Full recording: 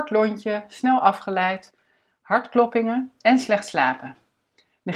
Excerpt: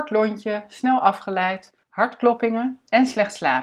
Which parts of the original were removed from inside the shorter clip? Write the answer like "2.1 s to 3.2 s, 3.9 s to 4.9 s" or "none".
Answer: 1.8 s to 2.2 s